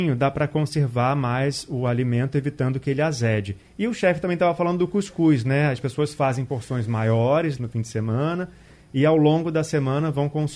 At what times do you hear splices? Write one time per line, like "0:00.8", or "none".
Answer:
0:03.6
0:07.6